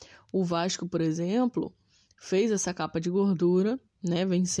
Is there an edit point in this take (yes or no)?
no